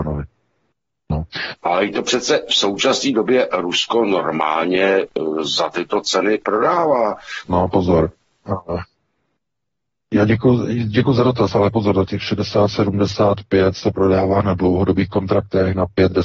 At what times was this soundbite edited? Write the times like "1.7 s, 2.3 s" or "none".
1.6 s, 7.5 s